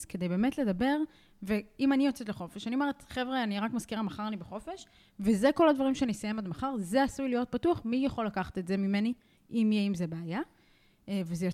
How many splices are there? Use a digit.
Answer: 0